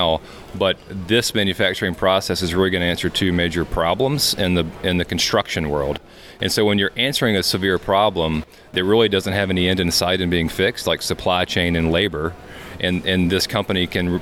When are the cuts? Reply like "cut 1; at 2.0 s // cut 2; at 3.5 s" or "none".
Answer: none